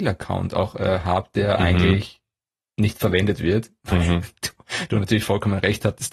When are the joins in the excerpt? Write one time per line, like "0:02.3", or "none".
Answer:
none